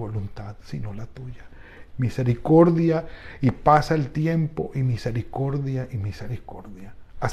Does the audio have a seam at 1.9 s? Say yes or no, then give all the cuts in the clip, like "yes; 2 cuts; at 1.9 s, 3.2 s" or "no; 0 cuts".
yes; 1 cut; at 1.9 s